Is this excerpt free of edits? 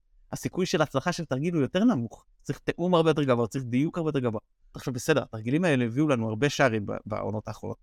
no; 1 cut; at 4.7 s

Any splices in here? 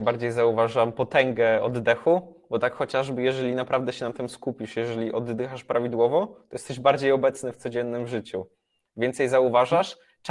no; 0 cuts

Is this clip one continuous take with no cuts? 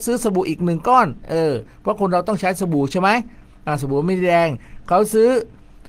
yes; 0 cuts

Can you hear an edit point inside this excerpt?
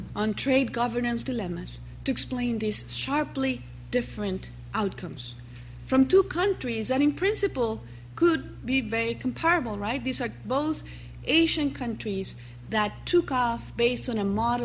no; 0 cuts

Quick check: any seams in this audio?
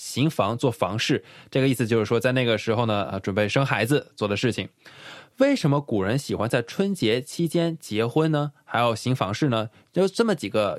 no; 0 cuts

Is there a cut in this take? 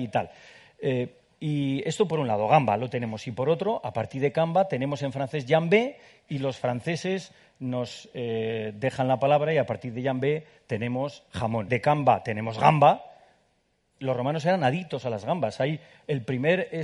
yes; 1 cut; at 11.7 s

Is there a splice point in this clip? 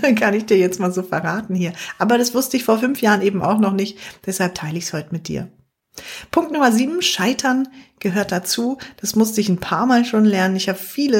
no; 0 cuts

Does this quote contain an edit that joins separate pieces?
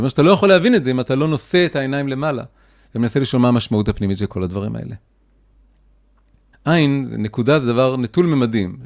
yes; 1 cut; at 6.5 s

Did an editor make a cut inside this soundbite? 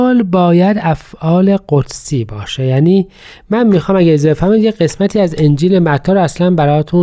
no; 0 cuts

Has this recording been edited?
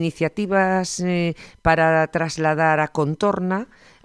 no; 0 cuts

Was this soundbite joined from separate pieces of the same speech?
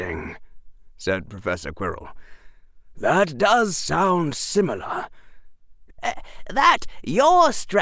yes; 1 cut; at 5.9 s

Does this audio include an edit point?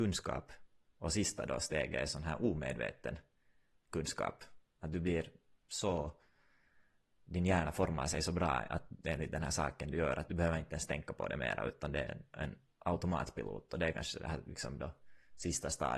no; 0 cuts

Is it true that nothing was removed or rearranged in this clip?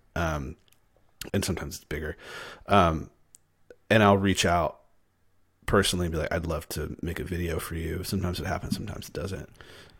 no; 1 cut; at 1.3 s

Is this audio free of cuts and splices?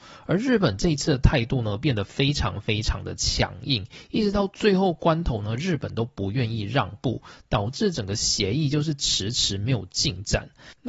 yes; 0 cuts

